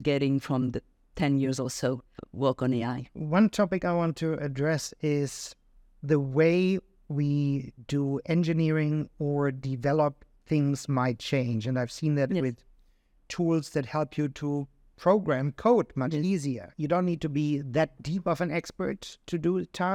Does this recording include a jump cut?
no; 0 cuts

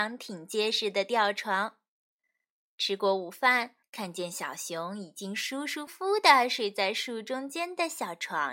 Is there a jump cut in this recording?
yes; 2 cuts; at 3.8 s, 5.9 s

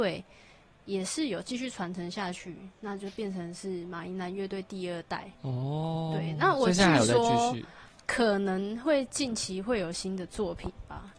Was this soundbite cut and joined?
no; 0 cuts

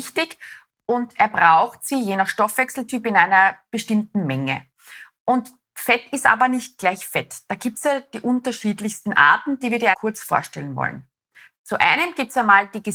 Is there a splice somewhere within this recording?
yes; 1 cut; at 9.9 s

